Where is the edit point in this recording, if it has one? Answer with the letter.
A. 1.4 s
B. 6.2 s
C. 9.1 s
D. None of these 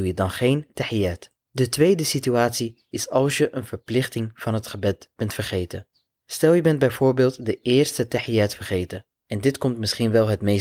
C